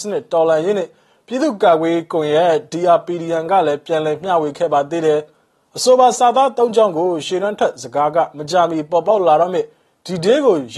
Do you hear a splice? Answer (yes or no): no